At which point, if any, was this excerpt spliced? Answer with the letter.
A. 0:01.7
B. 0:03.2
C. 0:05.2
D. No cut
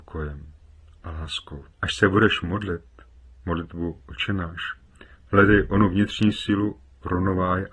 A